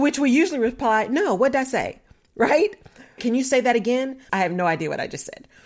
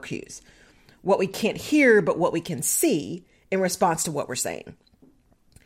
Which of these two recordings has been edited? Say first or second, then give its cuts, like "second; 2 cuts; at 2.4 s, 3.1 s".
first; 2 cuts; at 3.2 s, 4.3 s